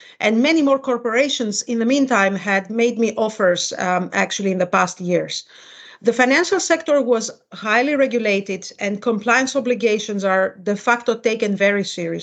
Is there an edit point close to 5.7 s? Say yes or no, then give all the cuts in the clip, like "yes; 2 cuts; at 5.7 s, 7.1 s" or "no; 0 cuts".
no; 0 cuts